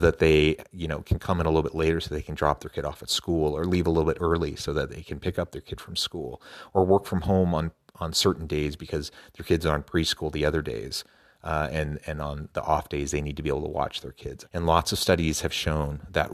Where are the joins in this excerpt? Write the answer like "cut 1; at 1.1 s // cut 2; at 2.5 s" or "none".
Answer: cut 1; at 14.4 s